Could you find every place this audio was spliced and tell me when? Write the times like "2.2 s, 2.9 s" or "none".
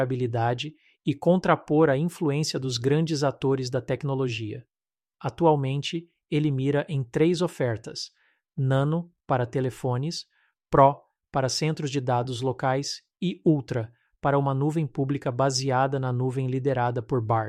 5.1 s